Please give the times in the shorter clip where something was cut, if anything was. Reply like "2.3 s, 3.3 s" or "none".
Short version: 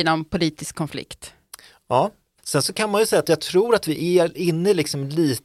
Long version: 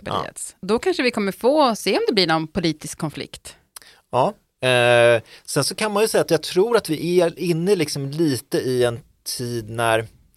2.4 s